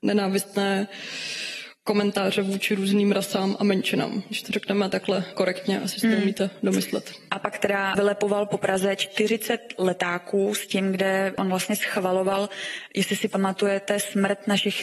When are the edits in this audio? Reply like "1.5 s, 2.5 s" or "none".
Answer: 7.9 s